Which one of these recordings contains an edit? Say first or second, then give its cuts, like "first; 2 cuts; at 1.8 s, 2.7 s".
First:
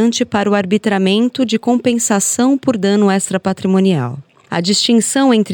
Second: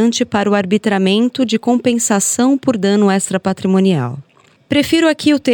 first; 1 cut; at 4.5 s